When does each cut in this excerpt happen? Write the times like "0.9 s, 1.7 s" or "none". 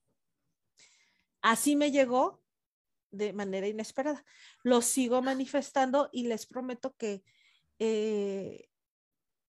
none

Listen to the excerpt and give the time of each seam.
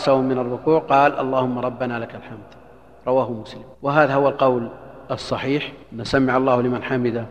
3.7 s, 5.8 s

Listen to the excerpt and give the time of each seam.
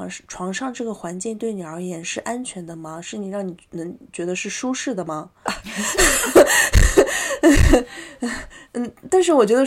5.5 s

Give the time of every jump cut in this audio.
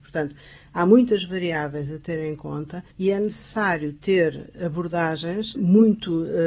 2.9 s, 5.5 s

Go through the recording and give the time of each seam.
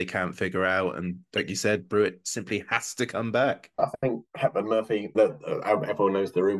3.8 s, 5.1 s

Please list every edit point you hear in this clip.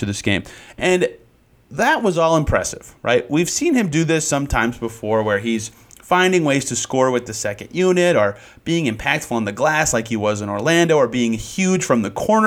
none

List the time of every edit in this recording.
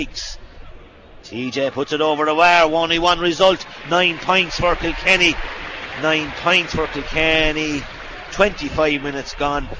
1.2 s

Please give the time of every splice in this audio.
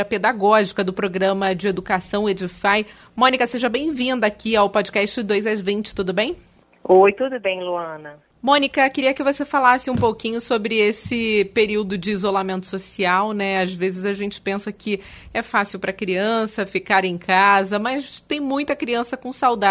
none

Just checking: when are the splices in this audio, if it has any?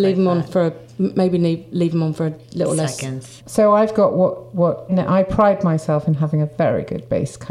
3.4 s, 4.9 s

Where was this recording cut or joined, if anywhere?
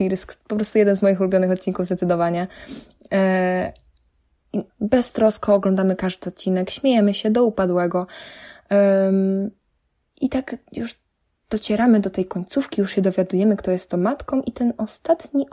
4.7 s, 10.1 s

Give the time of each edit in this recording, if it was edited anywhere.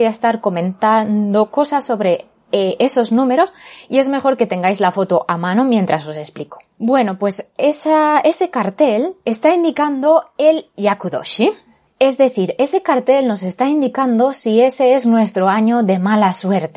none

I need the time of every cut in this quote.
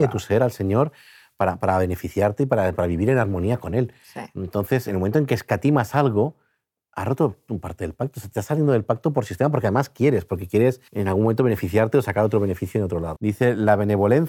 10.9 s, 13.2 s

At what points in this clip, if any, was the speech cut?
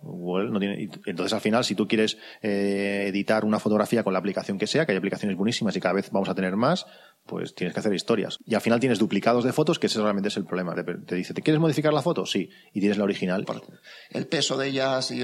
8.4 s, 10.7 s, 13.4 s

